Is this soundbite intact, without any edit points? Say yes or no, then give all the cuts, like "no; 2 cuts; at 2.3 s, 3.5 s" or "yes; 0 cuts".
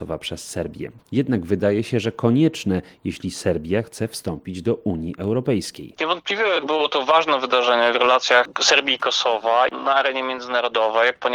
no; 2 cuts; at 1.0 s, 6.0 s